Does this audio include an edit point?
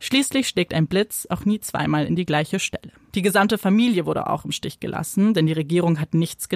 yes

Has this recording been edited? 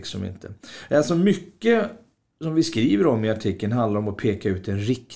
no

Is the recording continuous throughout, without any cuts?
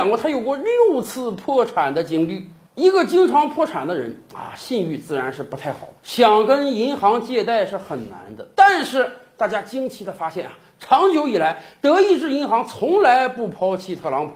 no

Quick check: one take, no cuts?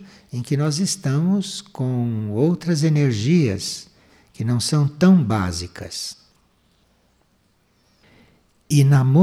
yes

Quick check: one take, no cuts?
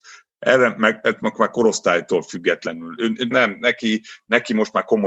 no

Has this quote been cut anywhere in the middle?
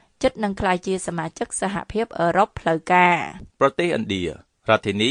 yes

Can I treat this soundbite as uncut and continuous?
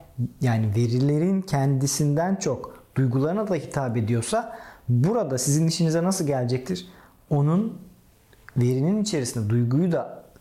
yes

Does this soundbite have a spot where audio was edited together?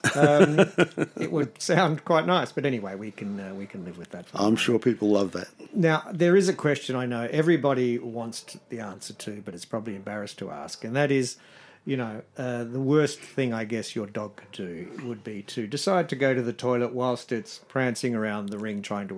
no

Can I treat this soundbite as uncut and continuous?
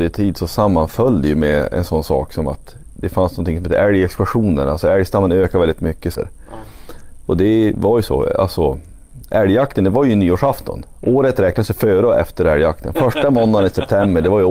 no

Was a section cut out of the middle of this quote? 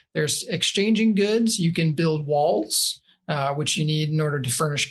no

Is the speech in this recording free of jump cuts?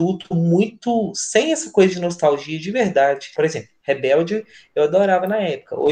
no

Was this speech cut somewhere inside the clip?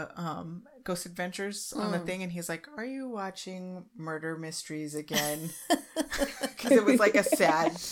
no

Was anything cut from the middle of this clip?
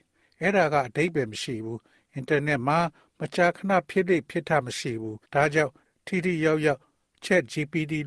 yes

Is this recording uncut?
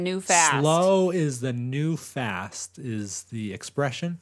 yes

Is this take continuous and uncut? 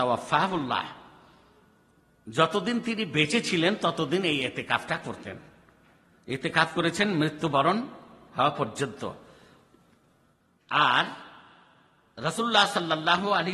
yes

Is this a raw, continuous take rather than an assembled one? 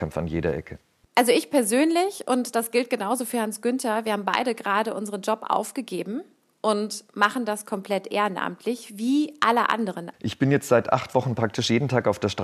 no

